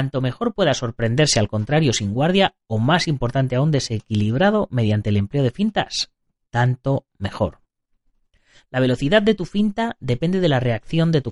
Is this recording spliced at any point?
no; 0 cuts

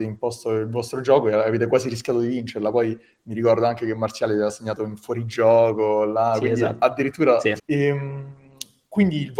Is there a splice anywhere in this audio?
yes; 1 cut; at 7.6 s

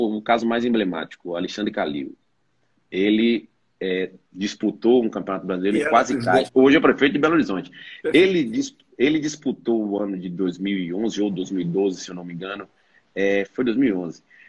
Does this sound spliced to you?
yes; 1 cut; at 6.5 s

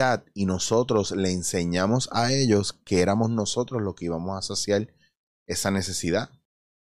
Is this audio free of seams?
yes; 0 cuts

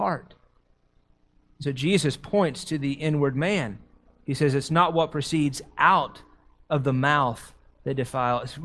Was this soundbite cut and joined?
no; 0 cuts

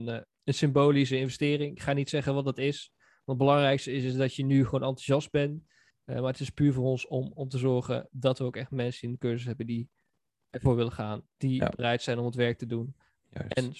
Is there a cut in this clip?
yes; 2 cuts; at 5.9 s, 11.3 s

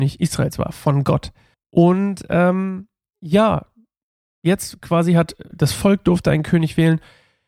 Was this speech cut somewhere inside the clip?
yes; 2 cuts; at 1.5 s, 5.5 s

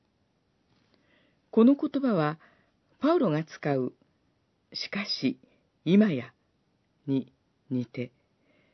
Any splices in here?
no; 0 cuts

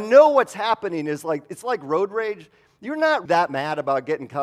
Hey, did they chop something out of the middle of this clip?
yes; 1 cut; at 3.3 s

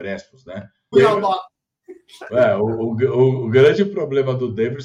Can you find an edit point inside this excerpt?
yes; 1 cut; at 0.9 s

